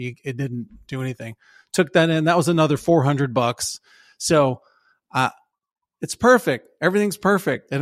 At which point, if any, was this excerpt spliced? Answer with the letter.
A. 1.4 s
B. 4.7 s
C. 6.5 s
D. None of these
D